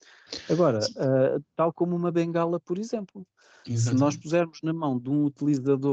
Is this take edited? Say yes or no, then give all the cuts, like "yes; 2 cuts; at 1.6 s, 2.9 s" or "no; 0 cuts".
no; 0 cuts